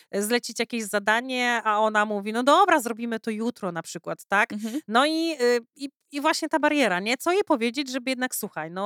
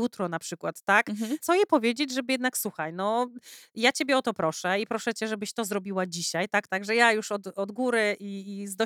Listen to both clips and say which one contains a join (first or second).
second